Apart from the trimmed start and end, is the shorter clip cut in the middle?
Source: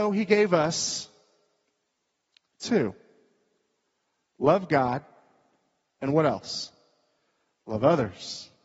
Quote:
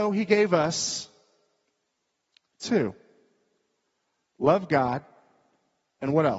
no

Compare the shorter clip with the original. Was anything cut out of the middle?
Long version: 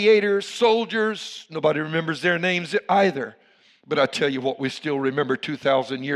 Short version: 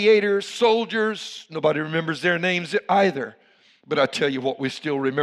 no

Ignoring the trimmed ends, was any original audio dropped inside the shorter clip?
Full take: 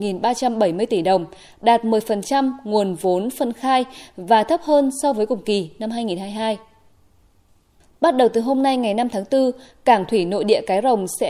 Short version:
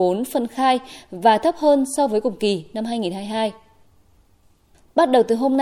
no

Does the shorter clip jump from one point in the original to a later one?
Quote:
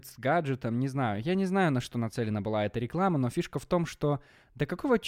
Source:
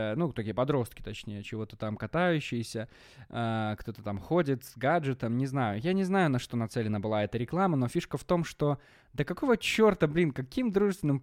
no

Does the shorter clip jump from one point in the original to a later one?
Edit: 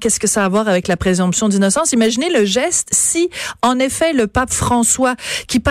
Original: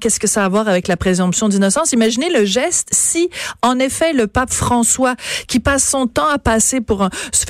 no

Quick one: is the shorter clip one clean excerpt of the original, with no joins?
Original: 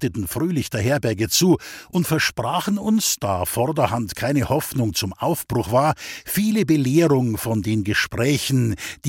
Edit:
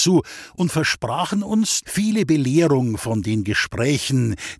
no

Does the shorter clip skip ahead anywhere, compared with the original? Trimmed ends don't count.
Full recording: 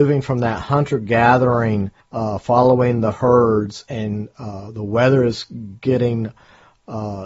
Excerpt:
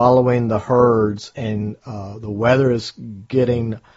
no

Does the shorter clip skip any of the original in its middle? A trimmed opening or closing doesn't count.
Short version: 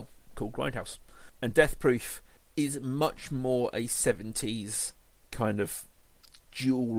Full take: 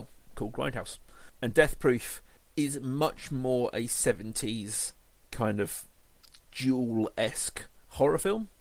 no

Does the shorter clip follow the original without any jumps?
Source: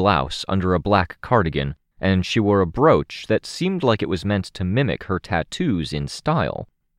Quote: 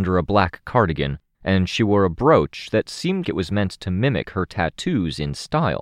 no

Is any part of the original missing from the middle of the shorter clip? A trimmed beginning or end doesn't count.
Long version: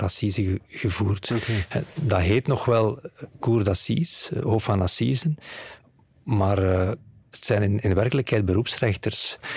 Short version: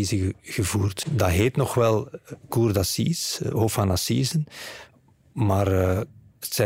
yes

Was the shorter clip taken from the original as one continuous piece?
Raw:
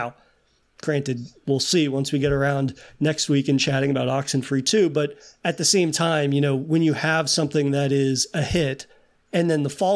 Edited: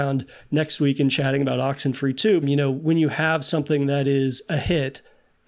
no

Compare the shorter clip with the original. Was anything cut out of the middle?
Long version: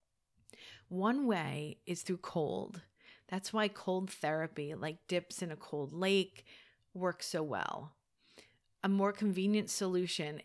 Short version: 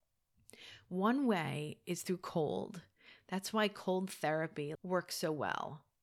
yes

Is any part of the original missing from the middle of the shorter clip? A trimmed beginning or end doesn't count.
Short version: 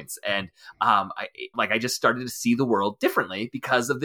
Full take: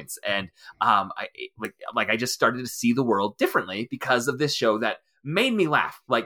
yes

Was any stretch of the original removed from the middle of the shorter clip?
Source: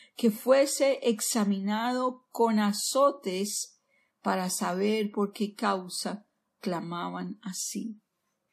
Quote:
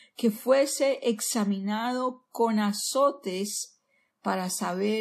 no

